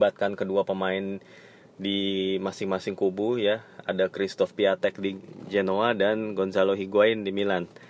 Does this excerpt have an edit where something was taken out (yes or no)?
no